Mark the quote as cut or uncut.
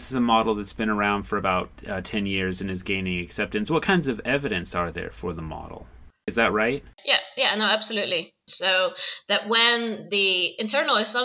cut